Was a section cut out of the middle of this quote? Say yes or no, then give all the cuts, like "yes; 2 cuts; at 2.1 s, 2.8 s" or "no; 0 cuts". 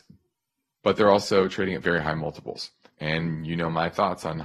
no; 0 cuts